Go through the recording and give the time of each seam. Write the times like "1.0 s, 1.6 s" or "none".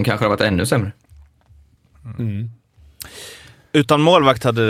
none